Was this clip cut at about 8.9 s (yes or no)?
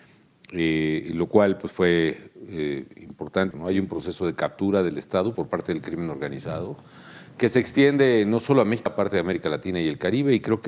yes